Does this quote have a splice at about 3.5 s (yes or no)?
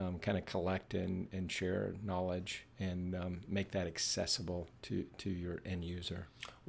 no